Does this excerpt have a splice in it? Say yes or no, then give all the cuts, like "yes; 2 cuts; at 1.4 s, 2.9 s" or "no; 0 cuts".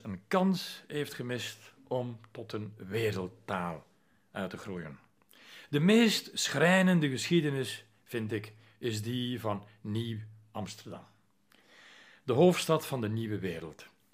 no; 0 cuts